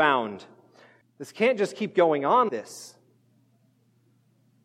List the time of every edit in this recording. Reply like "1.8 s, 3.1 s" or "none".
1.0 s, 2.5 s